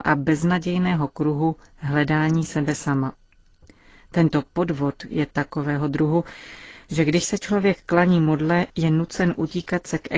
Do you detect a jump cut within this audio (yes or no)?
no